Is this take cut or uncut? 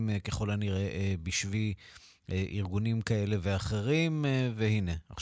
uncut